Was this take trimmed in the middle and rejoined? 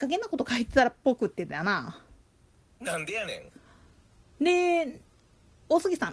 no; 0 cuts

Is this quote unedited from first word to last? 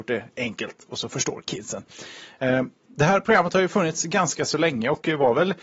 yes; 0 cuts

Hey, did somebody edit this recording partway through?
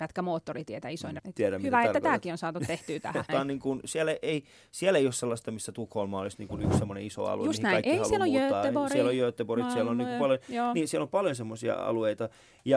yes; 2 cuts; at 1.2 s, 3.3 s

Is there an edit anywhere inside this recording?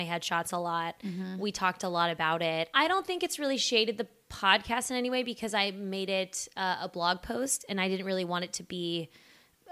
yes; 1 cut; at 2.7 s

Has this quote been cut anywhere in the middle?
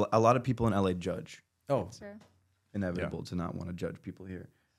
yes; 1 cut; at 2.0 s

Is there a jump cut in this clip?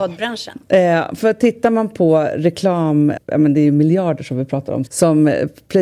yes; 2 cuts; at 3.2 s, 4.9 s

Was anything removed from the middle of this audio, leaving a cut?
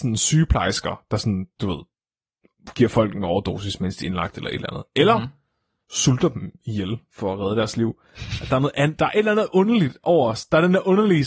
no; 0 cuts

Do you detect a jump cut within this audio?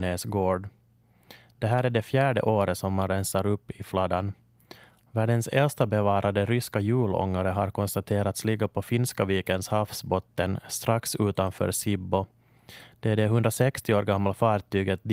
yes; 1 cut; at 5.0 s

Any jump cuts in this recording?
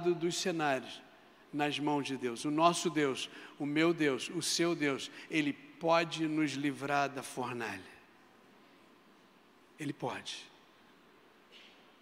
no; 0 cuts

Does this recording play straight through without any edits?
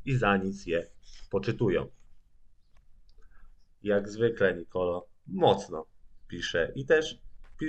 no; 1 cut; at 3.7 s

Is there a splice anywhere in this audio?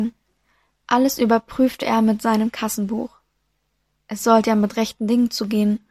no; 0 cuts

